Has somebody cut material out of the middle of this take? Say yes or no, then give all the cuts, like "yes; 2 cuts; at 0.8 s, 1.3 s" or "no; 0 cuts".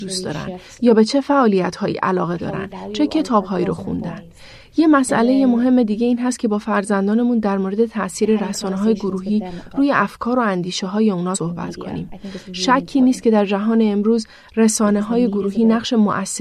no; 0 cuts